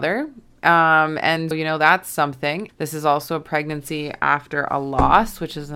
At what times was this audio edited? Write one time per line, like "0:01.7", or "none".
0:01.5
0:02.7